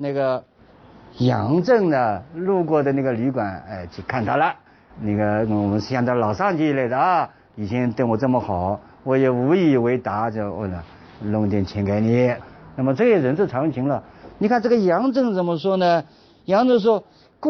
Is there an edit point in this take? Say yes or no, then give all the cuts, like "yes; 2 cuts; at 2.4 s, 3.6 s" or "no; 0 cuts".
no; 0 cuts